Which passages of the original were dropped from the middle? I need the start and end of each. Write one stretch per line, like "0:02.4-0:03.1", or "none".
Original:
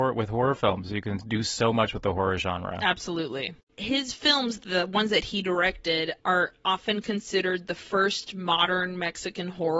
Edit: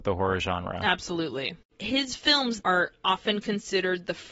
0:04.6-0:06.2